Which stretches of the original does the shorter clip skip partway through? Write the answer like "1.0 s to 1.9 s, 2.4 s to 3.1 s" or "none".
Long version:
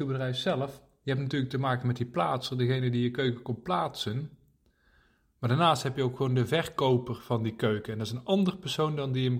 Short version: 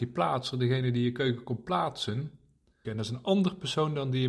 4.8 s to 7.9 s